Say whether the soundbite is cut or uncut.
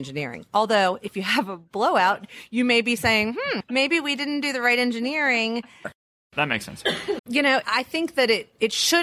cut